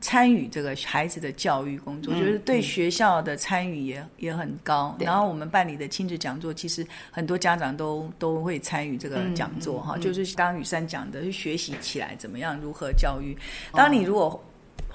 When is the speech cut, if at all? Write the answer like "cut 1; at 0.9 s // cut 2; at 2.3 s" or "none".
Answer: cut 1; at 10.3 s // cut 2; at 13.7 s